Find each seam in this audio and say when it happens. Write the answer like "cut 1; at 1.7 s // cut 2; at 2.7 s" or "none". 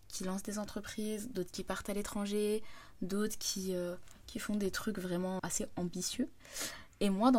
cut 1; at 5.4 s